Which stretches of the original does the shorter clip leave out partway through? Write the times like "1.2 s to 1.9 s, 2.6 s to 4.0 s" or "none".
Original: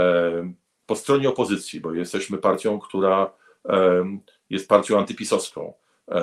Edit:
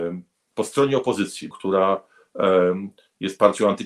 1.8 s to 2.8 s

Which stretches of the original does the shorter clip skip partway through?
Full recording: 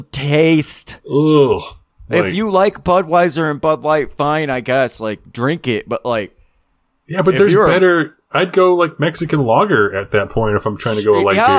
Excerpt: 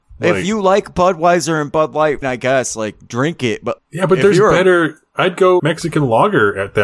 4.1 s to 4.5 s, 6.0 s to 6.9 s, 8.8 s to 9.0 s

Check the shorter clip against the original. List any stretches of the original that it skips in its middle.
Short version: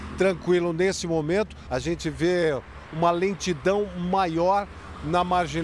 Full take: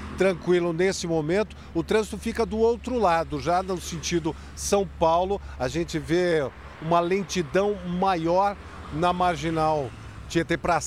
1.7 s to 5.6 s

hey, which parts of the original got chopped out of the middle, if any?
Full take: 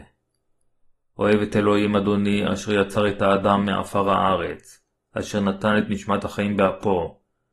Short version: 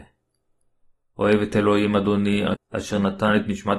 2.5 s to 5.0 s

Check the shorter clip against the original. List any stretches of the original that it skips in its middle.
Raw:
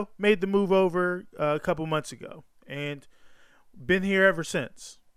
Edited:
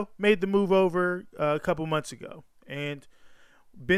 none

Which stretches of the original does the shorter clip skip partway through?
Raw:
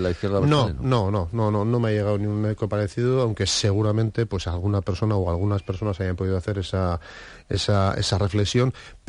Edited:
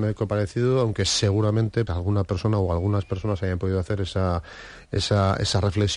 4.3 s to 4.4 s

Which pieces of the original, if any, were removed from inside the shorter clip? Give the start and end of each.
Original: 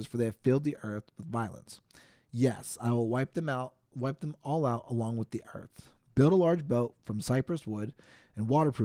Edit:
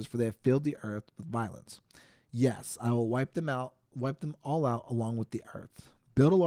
none

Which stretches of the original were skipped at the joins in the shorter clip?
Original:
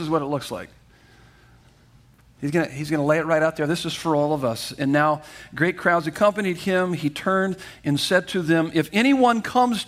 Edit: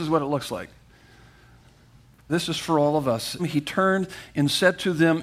2.3 s to 3.7 s, 4.8 s to 6.9 s

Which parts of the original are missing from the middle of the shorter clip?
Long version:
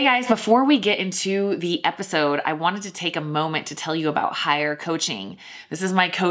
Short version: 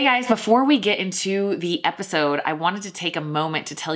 none

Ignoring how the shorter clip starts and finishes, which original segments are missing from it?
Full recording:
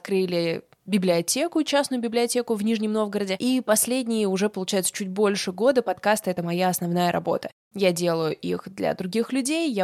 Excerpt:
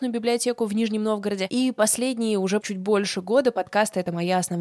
4.5 s to 4.9 s

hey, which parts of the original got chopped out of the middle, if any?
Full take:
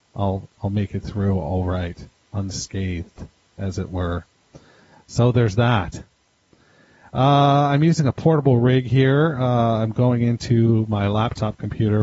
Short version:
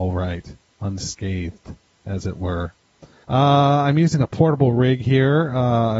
4.8 s to 7.1 s

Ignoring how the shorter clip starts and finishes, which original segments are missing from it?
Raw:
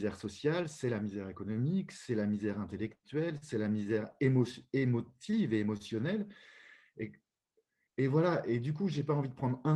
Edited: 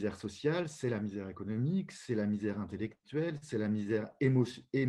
none

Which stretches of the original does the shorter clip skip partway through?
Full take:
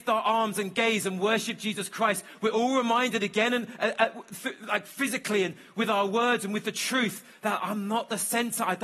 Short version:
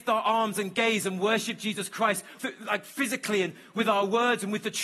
2.4 s to 4.4 s

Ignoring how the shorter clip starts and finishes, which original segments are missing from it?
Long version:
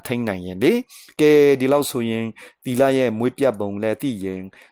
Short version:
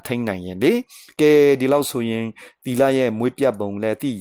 none

